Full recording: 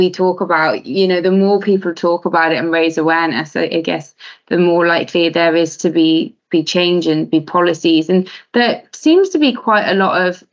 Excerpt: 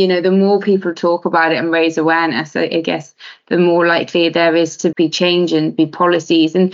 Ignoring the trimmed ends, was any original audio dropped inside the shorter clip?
yes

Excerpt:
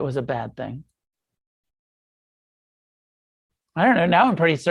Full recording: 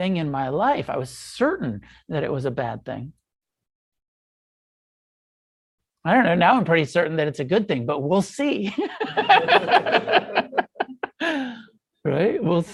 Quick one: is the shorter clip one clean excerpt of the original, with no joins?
yes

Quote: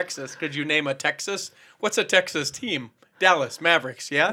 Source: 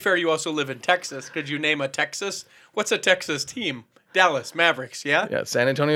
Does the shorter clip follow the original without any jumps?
yes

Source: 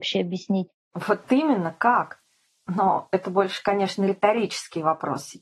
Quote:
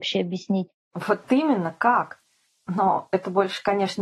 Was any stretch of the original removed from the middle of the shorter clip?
no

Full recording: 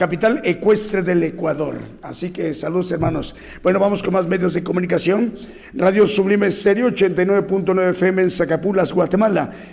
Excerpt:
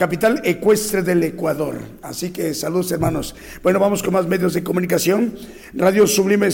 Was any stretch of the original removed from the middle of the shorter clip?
no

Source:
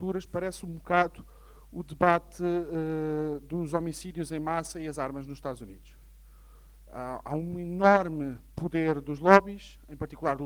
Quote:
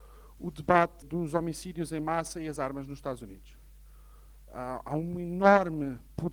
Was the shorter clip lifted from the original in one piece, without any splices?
no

